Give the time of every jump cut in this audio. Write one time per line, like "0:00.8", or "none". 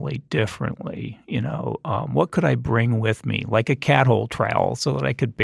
none